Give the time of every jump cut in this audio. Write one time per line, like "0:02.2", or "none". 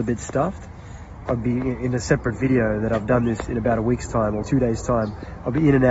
0:01.3
0:04.4